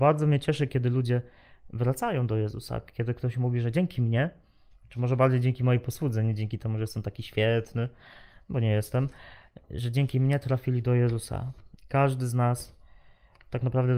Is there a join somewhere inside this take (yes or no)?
no